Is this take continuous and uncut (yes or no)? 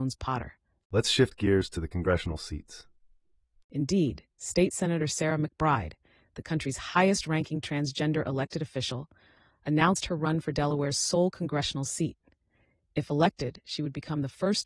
no